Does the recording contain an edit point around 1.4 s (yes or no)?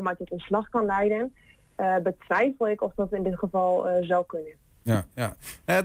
no